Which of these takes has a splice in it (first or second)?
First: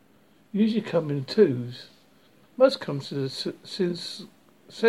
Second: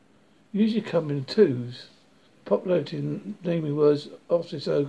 first